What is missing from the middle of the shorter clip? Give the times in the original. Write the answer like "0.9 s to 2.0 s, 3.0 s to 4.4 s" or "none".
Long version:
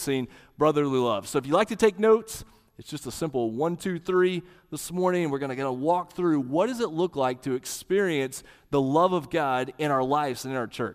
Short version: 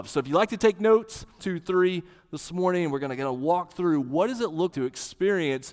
2.6 s to 3.8 s, 7.1 s to 7.4 s